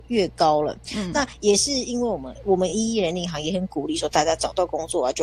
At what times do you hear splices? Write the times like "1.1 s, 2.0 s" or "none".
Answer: none